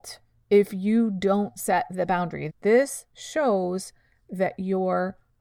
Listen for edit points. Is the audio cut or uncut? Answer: cut